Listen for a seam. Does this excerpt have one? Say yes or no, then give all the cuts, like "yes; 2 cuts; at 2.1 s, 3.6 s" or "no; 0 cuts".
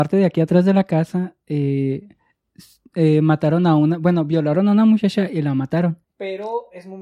yes; 1 cut; at 6.0 s